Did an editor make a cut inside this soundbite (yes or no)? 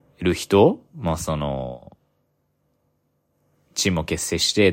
no